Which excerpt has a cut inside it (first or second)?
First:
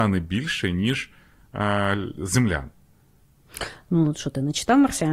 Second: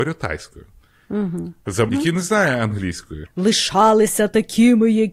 second